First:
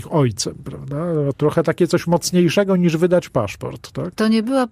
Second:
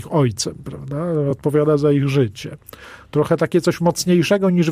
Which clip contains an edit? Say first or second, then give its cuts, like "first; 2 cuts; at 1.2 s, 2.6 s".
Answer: first; 1 cut; at 1.3 s